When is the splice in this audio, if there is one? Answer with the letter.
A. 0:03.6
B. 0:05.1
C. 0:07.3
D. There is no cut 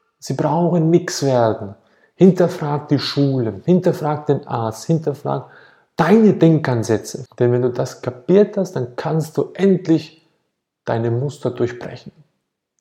C